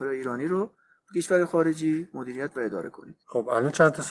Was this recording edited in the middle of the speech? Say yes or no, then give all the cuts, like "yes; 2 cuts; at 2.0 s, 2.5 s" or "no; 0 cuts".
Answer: yes; 1 cut; at 3.2 s